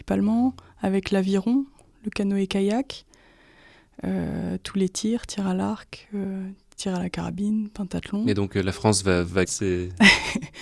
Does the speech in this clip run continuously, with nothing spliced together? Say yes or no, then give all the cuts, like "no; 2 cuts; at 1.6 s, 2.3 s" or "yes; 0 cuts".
no; 1 cut; at 9.4 s